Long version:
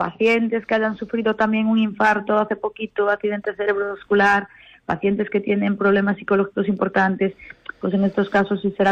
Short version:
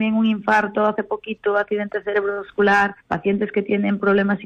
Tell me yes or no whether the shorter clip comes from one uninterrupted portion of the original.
no